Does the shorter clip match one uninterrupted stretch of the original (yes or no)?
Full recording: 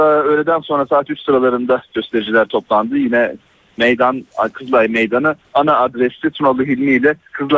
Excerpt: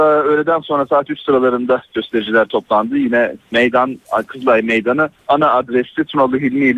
no